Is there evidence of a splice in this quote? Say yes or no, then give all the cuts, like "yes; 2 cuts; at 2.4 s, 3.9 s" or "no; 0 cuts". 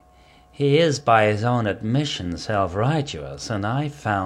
no; 0 cuts